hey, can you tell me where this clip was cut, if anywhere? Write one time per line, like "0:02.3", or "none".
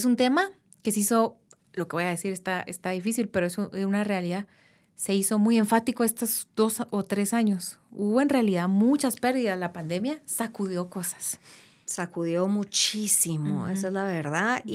none